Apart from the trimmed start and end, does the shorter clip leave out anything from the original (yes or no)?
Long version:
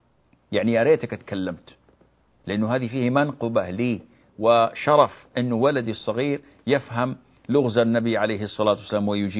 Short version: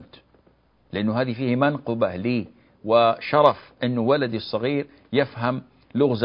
no